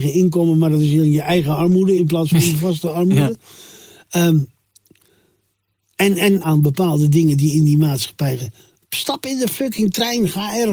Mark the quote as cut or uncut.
cut